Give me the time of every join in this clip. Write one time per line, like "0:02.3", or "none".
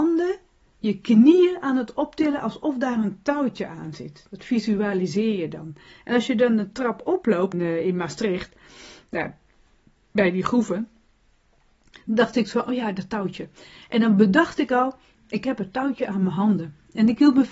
0:07.5